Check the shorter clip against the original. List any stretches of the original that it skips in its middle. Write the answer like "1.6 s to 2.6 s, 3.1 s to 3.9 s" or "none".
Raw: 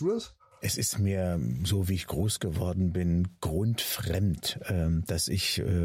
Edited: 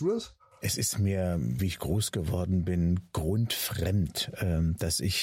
1.6 s to 1.9 s